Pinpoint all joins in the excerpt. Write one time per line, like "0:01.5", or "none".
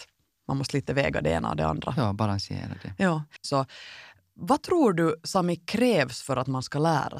0:03.4